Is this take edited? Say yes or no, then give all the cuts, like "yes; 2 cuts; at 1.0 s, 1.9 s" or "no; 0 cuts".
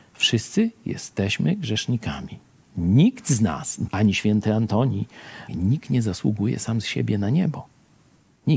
yes; 2 cuts; at 3.9 s, 5.5 s